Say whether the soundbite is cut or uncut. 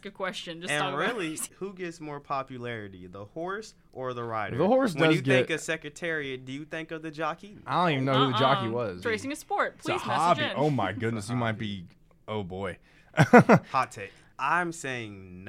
cut